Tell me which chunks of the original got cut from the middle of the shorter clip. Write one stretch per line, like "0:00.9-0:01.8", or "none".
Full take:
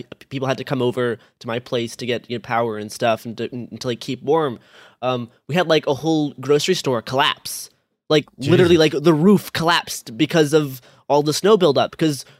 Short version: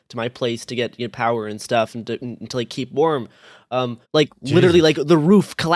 0:05.3-0:08.0